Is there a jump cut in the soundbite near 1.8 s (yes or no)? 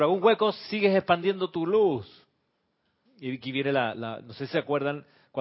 no